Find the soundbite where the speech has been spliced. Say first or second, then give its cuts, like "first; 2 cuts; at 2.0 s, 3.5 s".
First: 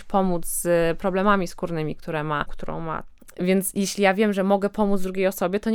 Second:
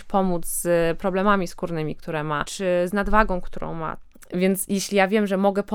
first; 1 cut; at 2.5 s